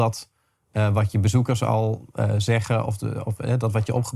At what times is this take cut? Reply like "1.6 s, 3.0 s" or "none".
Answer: none